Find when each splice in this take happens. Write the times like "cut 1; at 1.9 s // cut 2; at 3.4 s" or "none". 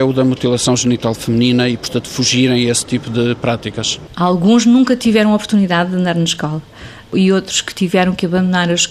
none